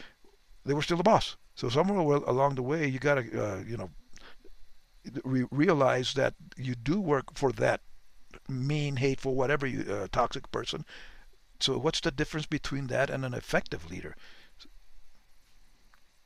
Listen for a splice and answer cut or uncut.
cut